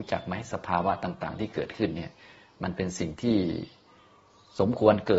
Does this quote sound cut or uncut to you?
uncut